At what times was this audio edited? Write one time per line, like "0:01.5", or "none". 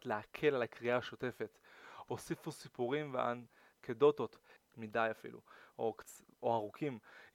0:04.6

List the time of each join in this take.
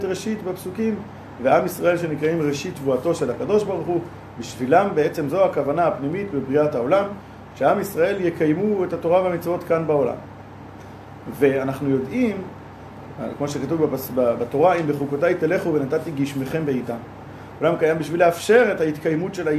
0:05.3
0:11.3
0:17.6

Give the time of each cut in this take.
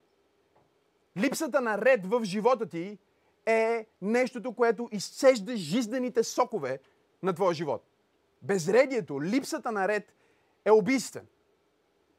0:01.0
0:08.4

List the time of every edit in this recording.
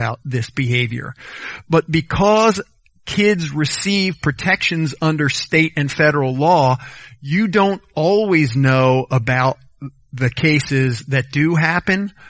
none

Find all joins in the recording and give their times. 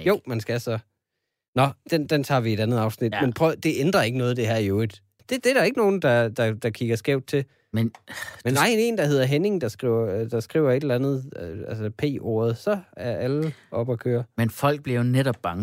0:05.2

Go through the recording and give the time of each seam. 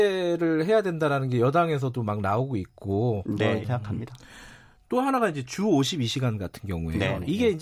0:03.6

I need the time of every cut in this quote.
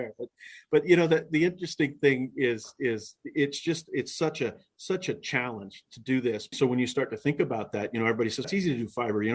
0:06.5
0:08.4

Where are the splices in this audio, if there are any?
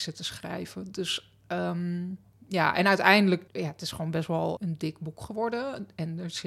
0:03.5
0:04.6

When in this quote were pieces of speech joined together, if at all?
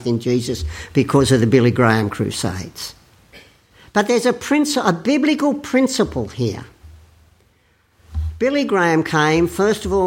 none

